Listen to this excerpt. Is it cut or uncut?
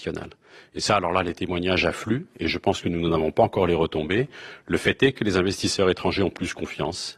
uncut